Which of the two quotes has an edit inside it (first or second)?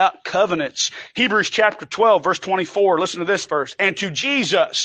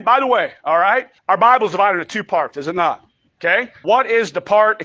second